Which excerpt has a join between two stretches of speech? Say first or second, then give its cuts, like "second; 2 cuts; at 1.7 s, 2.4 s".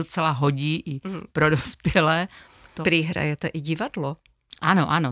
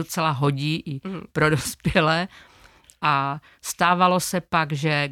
first; 1 cut; at 2.8 s